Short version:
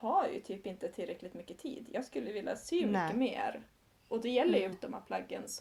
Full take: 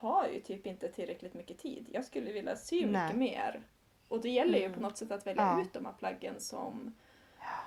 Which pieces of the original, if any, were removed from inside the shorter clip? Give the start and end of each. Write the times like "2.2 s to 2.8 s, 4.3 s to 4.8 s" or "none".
4.7 s to 5.6 s